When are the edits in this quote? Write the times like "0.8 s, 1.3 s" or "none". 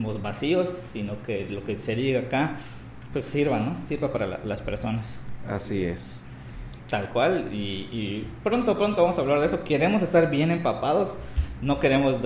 6.8 s